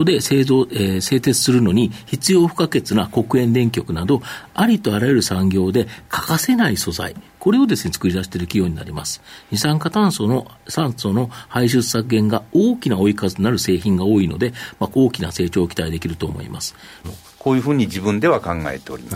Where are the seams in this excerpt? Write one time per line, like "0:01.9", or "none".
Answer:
0:14.9
0:17.0